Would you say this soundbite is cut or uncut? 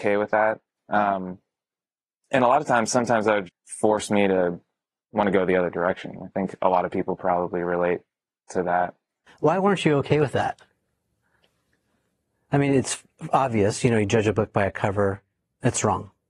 cut